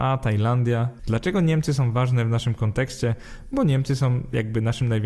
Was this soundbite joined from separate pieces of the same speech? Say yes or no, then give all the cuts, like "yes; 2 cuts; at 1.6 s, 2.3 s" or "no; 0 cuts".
yes; 1 cut; at 1.0 s